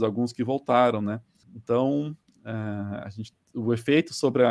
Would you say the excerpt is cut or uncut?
cut